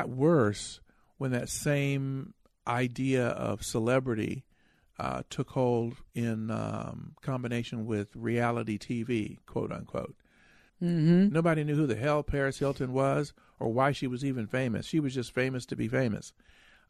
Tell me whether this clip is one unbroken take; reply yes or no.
no